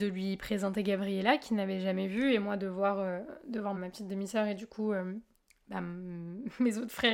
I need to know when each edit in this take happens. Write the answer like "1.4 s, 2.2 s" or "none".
3.7 s